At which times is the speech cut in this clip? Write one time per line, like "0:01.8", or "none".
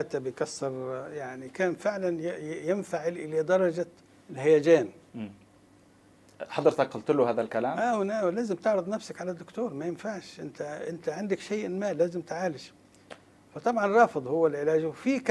none